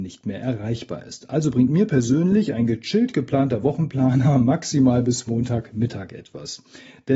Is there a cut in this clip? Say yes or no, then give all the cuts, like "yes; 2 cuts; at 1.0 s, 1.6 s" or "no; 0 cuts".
no; 0 cuts